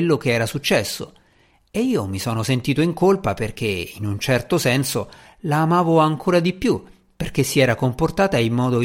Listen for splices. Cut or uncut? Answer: uncut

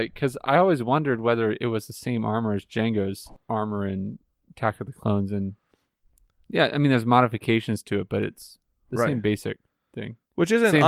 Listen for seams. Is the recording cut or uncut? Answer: uncut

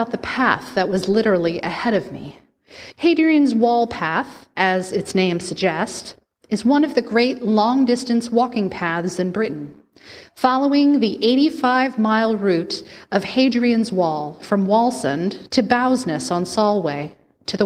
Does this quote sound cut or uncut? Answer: cut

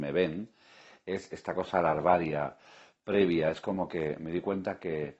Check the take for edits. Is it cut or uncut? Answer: uncut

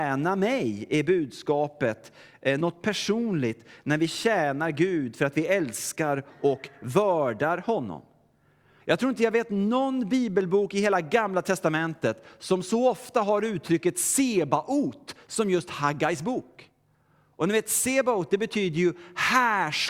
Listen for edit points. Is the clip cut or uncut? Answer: cut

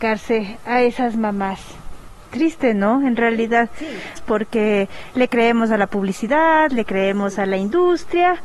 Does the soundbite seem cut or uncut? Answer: cut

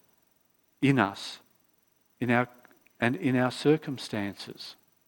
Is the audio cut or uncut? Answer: uncut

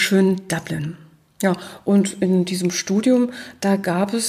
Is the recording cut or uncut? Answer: uncut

